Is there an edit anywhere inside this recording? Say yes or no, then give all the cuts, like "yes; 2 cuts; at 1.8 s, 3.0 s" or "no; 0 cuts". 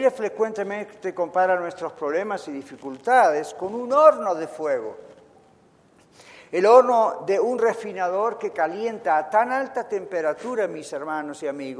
no; 0 cuts